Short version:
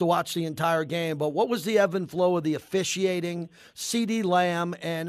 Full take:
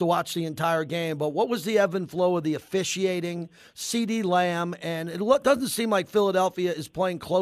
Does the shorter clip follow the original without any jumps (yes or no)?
yes